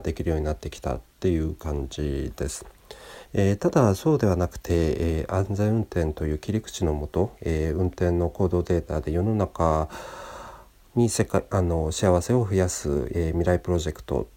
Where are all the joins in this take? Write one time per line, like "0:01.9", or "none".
0:03.3